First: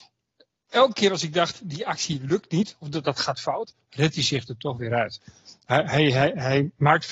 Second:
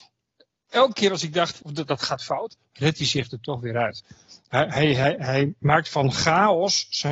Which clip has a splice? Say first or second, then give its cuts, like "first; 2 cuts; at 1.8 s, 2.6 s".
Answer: second; 1 cut; at 1.6 s